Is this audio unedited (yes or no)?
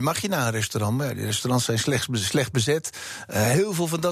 yes